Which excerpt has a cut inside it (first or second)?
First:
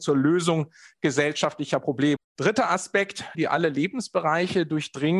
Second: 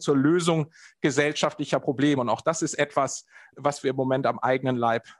first